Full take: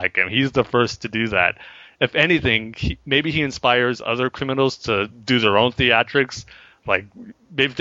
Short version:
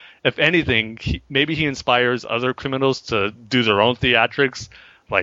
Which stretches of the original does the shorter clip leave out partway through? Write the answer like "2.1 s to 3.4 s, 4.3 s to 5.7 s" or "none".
none